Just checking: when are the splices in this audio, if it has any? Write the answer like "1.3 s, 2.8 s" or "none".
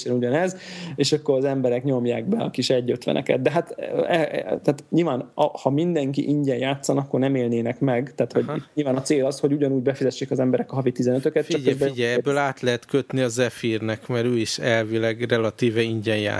none